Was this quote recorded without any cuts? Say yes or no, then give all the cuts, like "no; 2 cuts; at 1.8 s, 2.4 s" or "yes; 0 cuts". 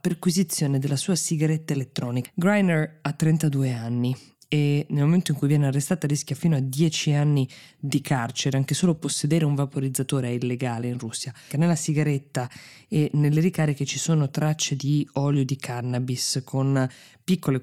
no; 2 cuts; at 2.2 s, 11.5 s